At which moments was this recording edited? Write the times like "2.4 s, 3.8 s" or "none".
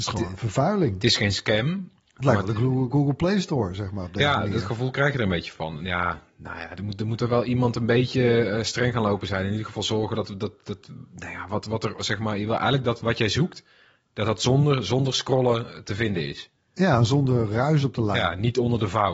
none